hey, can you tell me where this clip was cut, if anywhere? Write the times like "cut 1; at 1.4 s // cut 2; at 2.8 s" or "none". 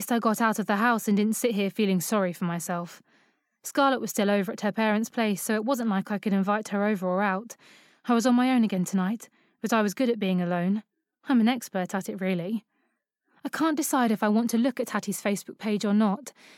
none

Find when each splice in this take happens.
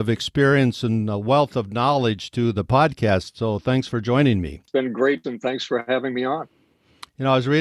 cut 1; at 5.2 s

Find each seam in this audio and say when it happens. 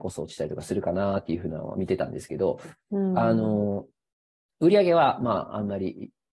none

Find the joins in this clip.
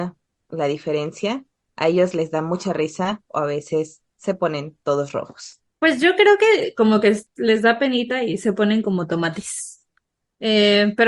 cut 1; at 5.7 s

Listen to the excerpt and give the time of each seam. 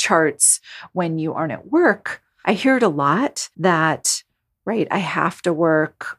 cut 1; at 2.4 s // cut 2; at 3.5 s

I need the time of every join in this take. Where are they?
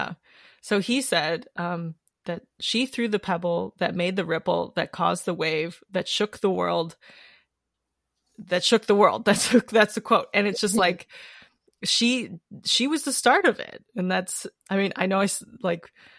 cut 1; at 14.6 s

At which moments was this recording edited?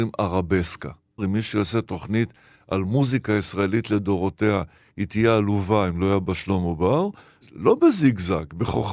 cut 1; at 1.2 s // cut 2; at 7.4 s

